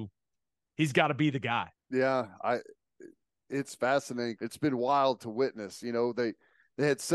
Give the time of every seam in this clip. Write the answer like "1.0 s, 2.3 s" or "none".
1.7 s, 4.4 s